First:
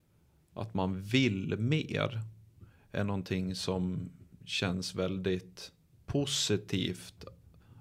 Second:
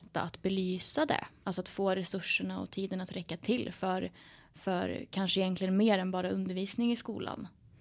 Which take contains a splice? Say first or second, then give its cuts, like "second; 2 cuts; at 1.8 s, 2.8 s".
second; 1 cut; at 1.4 s